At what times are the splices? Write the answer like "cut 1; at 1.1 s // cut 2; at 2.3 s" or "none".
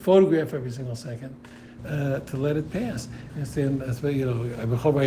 cut 1; at 1.8 s // cut 2; at 3.3 s